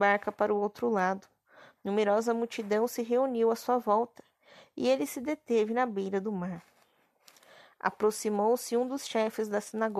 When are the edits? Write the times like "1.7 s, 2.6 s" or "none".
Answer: none